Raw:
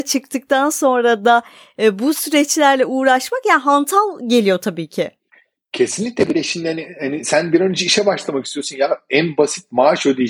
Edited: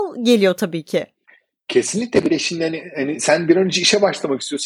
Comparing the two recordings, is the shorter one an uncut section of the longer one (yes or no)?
yes